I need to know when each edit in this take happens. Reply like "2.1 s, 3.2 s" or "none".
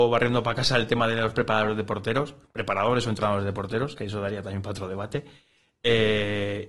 none